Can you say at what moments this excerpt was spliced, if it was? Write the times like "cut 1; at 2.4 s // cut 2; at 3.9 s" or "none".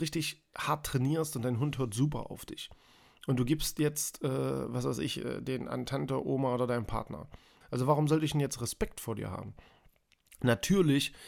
cut 1; at 7.6 s

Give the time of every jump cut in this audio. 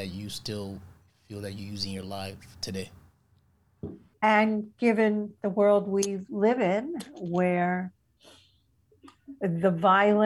cut 1; at 4.1 s

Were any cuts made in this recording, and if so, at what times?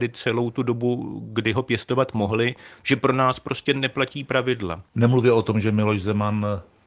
cut 1; at 2.8 s // cut 2; at 4.9 s

